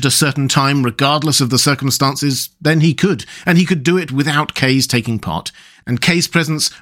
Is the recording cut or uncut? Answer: uncut